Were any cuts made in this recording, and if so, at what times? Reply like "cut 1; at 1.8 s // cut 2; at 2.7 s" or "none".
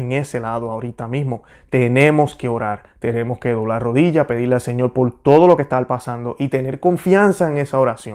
none